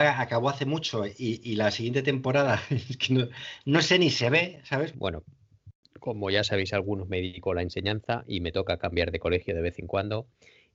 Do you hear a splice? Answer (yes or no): yes